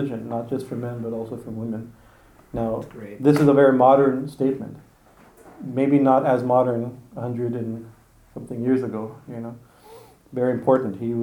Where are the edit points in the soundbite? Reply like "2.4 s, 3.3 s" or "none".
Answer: none

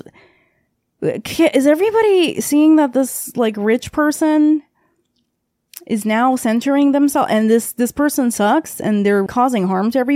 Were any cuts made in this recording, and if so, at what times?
9.3 s

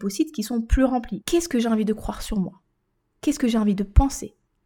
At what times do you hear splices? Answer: 1.2 s

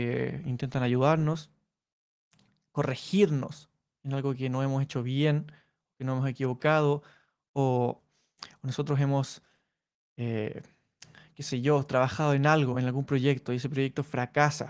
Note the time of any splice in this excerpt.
none

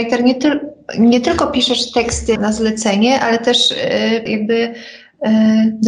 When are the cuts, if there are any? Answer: 2.4 s, 4.3 s

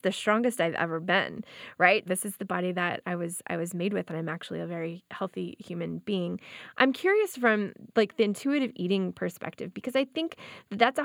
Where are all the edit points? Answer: 2.1 s

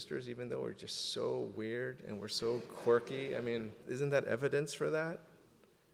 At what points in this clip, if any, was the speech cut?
none

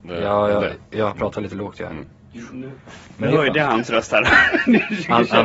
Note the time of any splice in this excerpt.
1.1 s

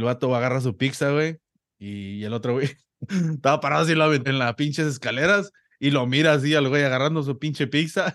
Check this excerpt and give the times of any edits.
3.1 s, 4.3 s

